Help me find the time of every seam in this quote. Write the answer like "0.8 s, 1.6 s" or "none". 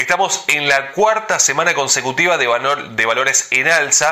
none